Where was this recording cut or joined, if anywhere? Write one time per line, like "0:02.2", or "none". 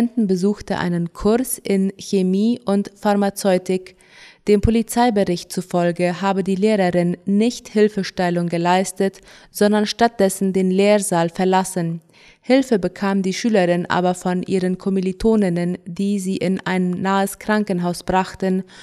none